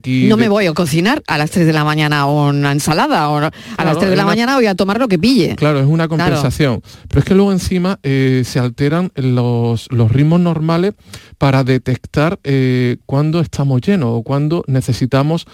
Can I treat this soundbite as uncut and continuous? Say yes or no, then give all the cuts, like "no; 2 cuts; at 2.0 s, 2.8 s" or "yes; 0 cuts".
yes; 0 cuts